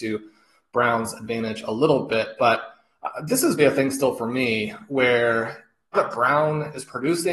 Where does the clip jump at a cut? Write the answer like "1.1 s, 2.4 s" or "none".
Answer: 3.6 s, 5.9 s